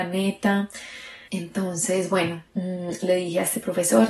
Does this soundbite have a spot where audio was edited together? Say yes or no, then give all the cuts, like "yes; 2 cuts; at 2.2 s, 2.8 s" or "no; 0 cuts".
yes; 2 cuts; at 1.3 s, 2.5 s